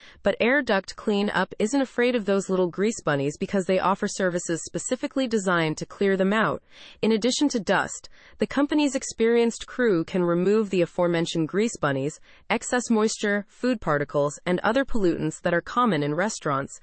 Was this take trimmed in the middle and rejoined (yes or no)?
no